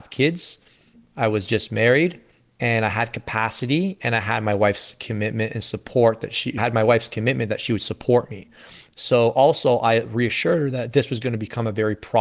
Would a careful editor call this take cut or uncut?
uncut